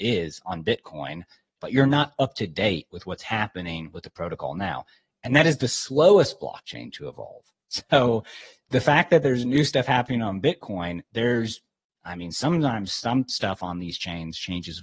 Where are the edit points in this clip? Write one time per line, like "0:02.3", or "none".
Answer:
0:01.6